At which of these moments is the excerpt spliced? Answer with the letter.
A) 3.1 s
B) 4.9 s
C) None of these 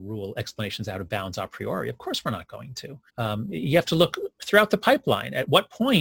A